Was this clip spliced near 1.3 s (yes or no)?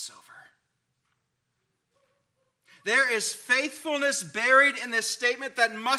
no